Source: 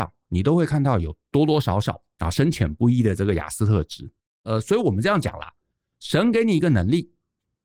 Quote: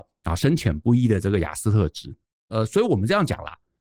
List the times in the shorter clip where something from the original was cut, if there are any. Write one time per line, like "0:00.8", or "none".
none